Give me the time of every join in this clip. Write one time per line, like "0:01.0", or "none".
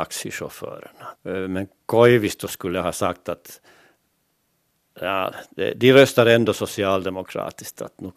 0:01.2